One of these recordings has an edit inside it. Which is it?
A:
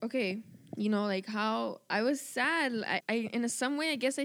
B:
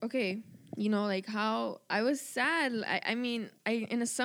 A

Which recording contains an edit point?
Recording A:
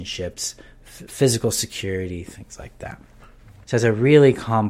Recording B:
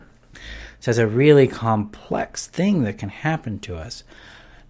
A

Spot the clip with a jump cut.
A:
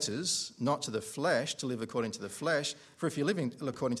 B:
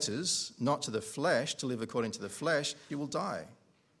B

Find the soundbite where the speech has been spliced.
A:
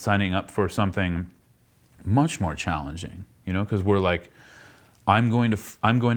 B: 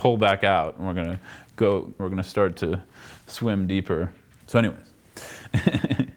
B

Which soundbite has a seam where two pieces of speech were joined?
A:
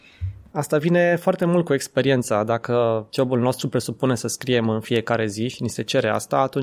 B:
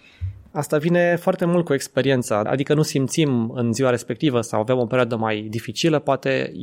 B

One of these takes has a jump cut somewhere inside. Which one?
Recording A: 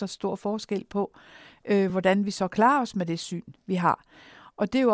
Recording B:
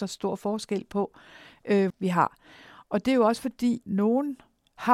B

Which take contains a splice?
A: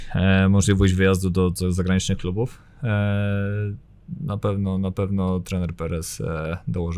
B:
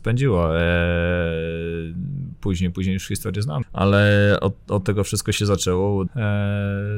B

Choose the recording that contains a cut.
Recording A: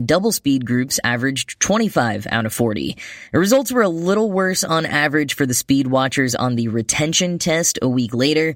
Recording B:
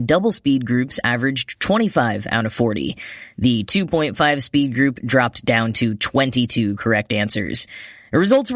A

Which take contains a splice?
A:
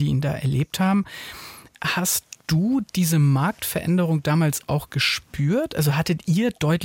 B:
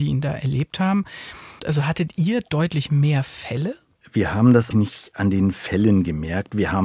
B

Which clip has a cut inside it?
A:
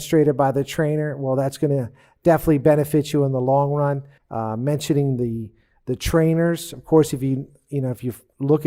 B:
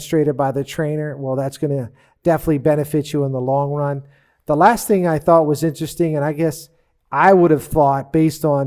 A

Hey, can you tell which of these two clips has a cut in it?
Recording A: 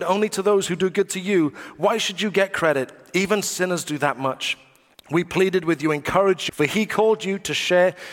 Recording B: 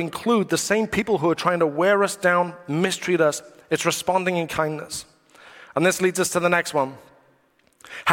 A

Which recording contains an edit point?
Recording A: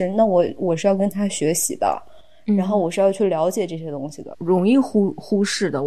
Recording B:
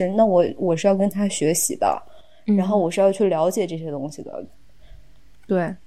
A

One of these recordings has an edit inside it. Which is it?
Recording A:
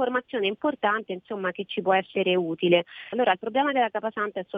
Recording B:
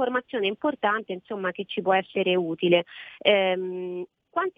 A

